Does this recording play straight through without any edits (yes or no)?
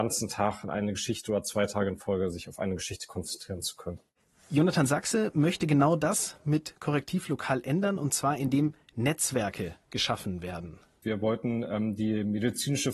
no